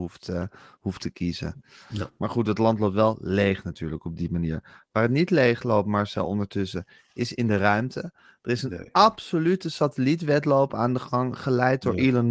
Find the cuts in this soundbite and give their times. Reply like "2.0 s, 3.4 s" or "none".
none